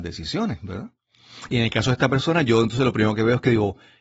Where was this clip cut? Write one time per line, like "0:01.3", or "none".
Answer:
0:01.5